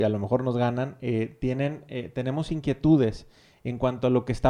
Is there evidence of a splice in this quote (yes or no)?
no